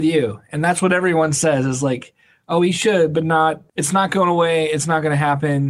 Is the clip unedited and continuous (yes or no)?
yes